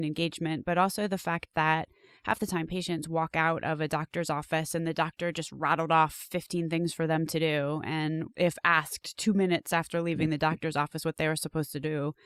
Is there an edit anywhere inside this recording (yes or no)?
no